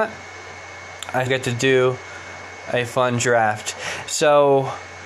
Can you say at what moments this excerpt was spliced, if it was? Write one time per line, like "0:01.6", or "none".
0:01.3
0:04.1